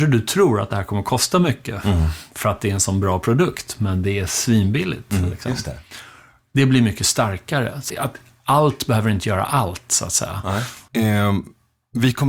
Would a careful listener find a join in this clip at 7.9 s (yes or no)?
yes